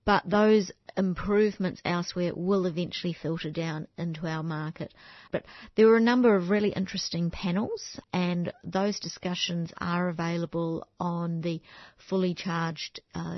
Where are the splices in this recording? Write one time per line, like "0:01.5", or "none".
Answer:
0:05.3
0:08.0